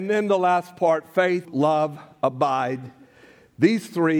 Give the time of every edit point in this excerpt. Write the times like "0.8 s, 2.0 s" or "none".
1.4 s